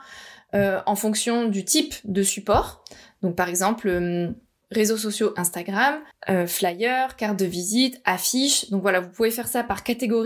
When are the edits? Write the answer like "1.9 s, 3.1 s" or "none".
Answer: 6.1 s